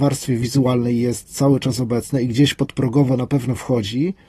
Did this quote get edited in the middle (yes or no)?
no